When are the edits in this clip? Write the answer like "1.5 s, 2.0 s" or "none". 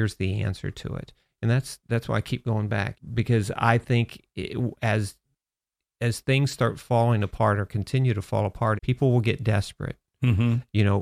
2.9 s, 8.8 s